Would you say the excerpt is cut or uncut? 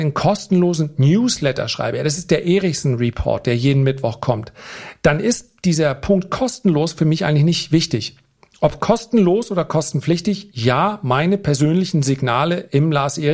uncut